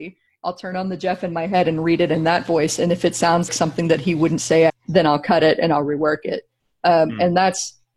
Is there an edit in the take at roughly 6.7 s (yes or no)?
no